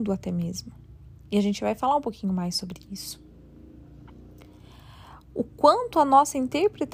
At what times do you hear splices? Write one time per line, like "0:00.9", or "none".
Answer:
none